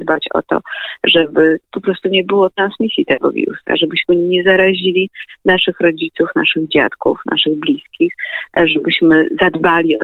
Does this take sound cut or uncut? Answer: uncut